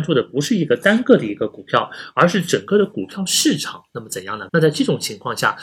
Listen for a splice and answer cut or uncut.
cut